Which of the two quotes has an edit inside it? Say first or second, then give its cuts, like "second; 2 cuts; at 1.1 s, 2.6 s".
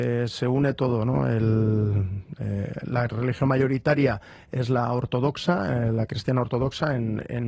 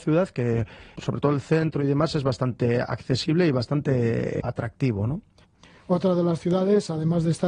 second; 2 cuts; at 0.9 s, 4.4 s